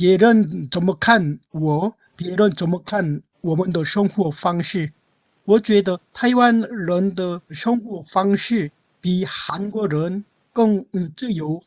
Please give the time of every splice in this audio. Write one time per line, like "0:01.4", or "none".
0:05.4